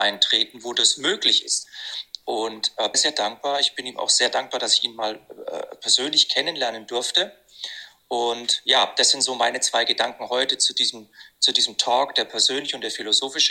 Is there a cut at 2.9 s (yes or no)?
yes